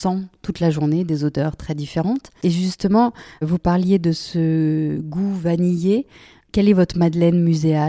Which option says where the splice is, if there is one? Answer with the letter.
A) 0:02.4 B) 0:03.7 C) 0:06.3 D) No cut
D